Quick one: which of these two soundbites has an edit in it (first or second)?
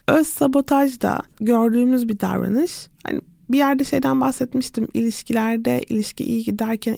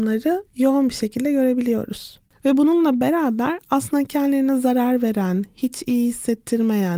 second